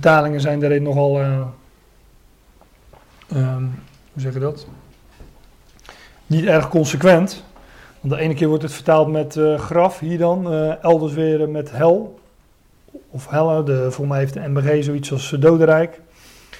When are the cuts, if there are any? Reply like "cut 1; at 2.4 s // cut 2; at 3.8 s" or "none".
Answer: none